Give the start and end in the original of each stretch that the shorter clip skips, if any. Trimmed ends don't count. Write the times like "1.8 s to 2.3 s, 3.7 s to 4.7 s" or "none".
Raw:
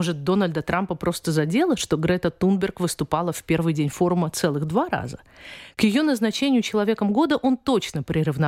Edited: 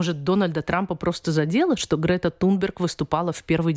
none